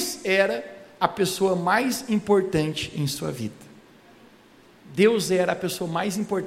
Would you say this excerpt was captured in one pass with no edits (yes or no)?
yes